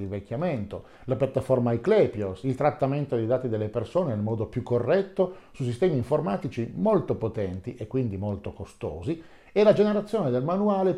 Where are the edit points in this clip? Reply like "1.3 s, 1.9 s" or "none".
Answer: none